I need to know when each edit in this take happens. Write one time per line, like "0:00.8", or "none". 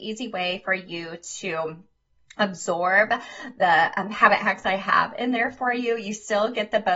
none